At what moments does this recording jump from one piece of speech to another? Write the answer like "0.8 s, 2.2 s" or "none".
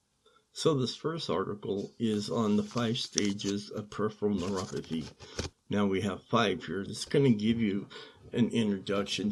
5.5 s, 6.9 s